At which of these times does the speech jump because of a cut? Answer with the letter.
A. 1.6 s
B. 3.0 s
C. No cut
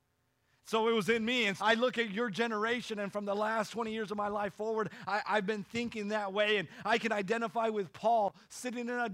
A